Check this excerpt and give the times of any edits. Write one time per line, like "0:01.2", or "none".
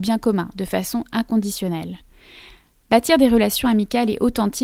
none